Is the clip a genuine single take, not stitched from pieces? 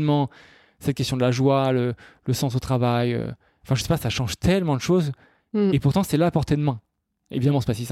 yes; 0 cuts

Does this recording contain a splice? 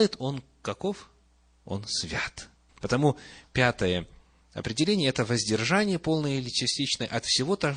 yes; 1 cut; at 2.7 s

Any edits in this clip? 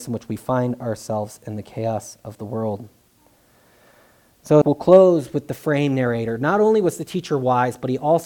yes; 1 cut; at 4.6 s

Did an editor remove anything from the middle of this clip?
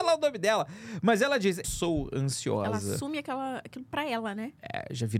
yes; 1 cut; at 1.6 s

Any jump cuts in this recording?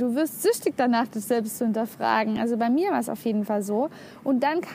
no; 0 cuts

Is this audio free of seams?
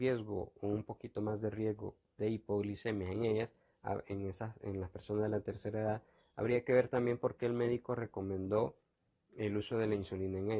yes; 0 cuts

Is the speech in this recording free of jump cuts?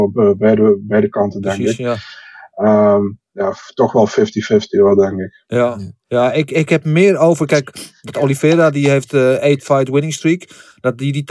yes; 0 cuts

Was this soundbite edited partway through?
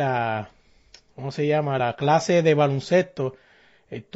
no; 0 cuts

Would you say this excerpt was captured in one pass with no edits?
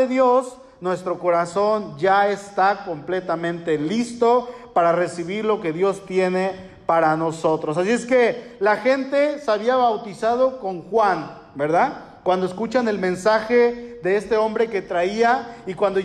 yes; 0 cuts

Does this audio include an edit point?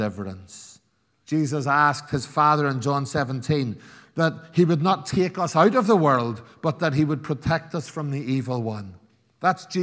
yes; 1 cut; at 1.2 s

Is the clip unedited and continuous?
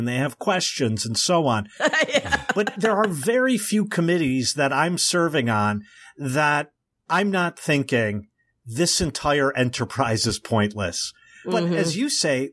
no; 1 cut; at 1.8 s

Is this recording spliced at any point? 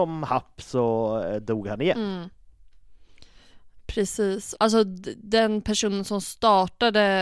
yes; 1 cut; at 4.5 s

